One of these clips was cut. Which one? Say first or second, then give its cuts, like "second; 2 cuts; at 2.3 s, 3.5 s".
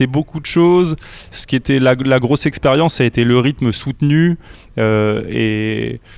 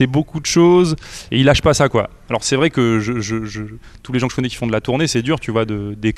second; 1 cut; at 1.3 s